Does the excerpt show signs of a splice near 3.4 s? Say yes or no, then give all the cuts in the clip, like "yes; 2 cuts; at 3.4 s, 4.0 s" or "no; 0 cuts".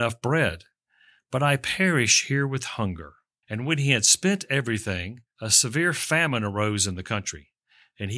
yes; 1 cut; at 3.4 s